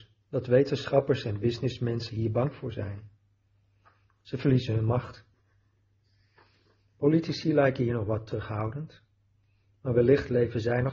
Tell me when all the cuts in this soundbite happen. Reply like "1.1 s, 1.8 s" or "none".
none